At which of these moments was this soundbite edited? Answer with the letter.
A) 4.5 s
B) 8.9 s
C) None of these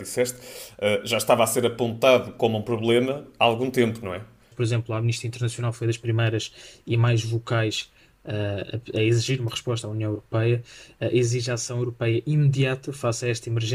A